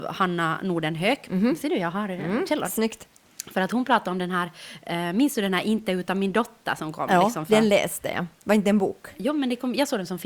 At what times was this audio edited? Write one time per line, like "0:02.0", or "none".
none